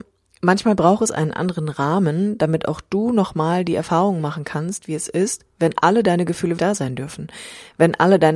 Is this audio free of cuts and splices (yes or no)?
no